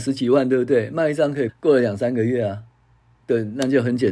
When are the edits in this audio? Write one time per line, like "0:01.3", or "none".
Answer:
0:01.5